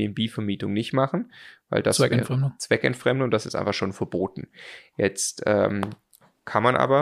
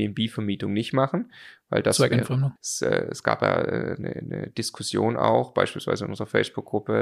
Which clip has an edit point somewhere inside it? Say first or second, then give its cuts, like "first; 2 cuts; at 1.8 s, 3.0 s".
second; 2 cuts; at 2.6 s, 4.0 s